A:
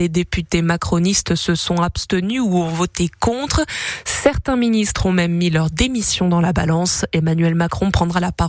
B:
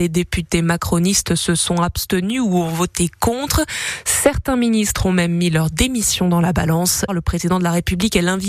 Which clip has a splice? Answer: B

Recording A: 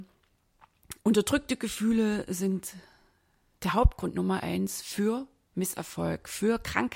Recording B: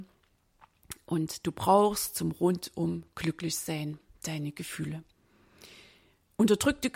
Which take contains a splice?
A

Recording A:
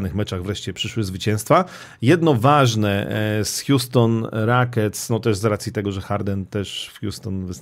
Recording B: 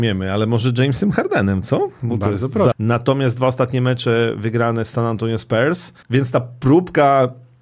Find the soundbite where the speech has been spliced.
B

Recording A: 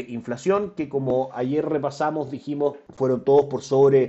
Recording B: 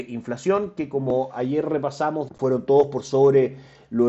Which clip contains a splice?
B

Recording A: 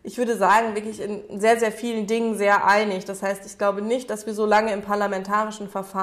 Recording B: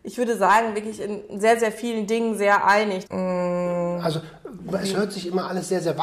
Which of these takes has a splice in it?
B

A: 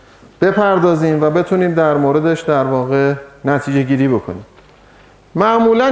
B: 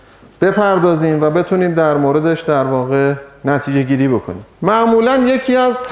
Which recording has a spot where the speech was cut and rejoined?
B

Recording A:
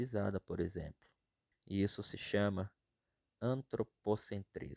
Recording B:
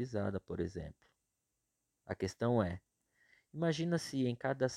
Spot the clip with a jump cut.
A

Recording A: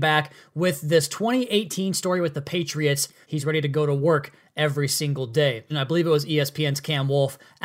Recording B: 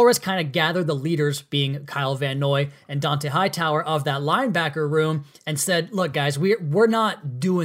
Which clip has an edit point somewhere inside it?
A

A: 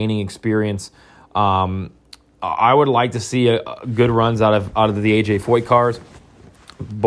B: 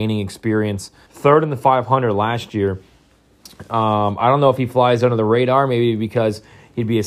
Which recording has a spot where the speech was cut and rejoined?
B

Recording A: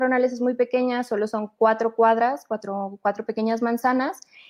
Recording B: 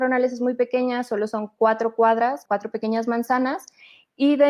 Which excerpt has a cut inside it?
B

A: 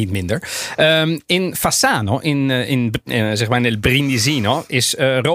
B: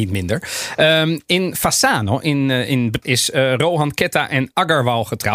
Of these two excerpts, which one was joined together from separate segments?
B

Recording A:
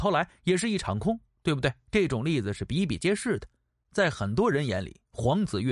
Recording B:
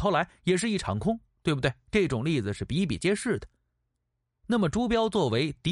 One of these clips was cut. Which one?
A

